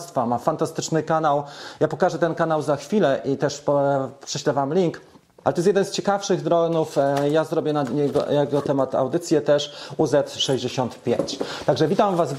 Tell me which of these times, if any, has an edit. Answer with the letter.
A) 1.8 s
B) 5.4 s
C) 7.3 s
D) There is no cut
B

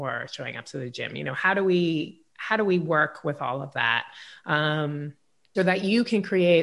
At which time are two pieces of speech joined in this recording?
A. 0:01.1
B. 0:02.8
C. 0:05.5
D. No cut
C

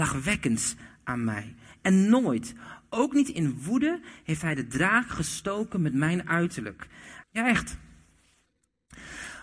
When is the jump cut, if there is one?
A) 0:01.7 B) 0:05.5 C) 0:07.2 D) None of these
C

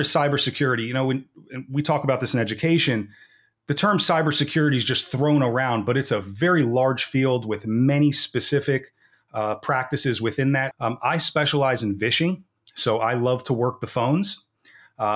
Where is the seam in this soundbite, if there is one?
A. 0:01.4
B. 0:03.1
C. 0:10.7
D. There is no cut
C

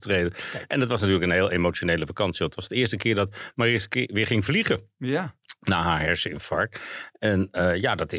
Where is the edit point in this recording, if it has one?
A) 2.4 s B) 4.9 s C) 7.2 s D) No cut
D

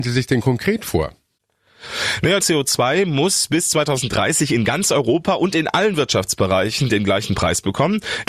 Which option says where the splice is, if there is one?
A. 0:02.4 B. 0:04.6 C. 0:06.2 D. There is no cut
A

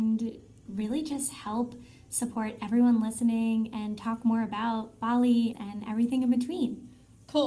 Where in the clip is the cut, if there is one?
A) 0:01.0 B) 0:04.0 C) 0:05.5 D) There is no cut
C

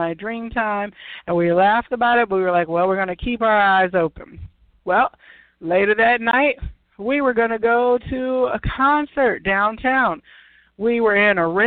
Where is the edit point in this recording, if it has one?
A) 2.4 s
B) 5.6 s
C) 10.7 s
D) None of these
D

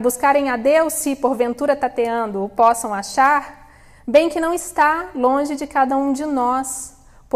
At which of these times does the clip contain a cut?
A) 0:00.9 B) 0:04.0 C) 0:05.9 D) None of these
D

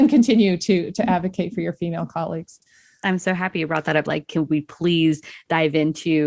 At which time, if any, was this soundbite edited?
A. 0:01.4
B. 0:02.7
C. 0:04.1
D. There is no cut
C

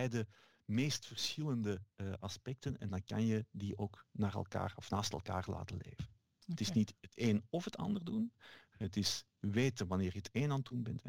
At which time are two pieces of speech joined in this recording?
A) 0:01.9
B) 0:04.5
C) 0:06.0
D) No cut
D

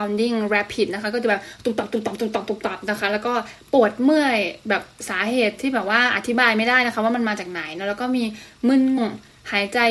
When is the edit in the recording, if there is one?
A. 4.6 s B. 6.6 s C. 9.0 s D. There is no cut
C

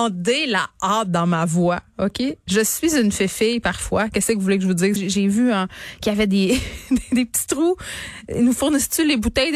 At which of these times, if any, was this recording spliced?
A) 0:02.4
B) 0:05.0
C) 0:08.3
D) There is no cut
B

